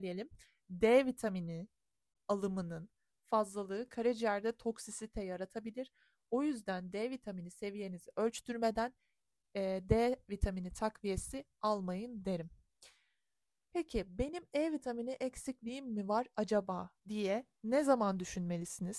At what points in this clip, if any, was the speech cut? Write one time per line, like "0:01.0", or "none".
0:13.7
0:17.0